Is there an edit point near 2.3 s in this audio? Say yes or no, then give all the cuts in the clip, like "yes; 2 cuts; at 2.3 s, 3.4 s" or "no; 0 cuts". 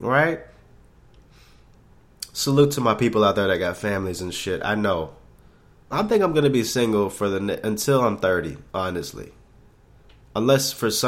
no; 2 cuts; at 5.9 s, 8.7 s